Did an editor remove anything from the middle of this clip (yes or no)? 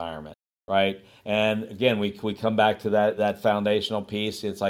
yes